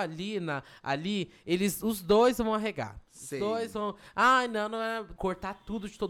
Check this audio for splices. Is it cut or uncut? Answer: cut